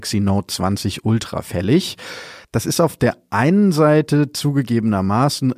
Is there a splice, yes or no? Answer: yes